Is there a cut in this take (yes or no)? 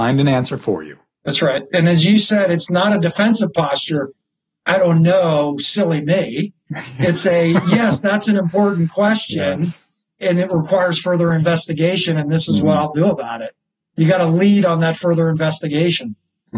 no